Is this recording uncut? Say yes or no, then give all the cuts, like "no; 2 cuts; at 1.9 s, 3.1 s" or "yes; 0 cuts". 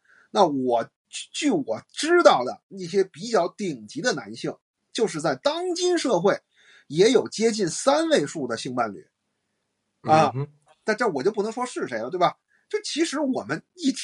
yes; 0 cuts